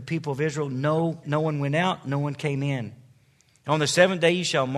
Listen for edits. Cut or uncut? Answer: cut